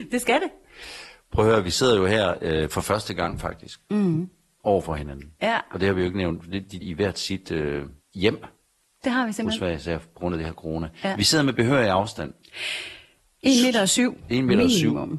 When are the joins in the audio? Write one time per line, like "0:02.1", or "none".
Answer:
0:06.8